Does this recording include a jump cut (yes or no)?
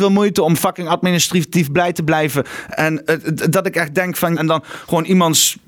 yes